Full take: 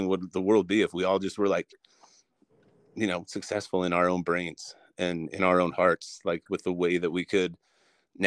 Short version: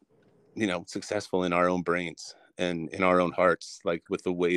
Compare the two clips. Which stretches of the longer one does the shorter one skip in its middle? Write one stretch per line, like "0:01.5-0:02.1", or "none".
none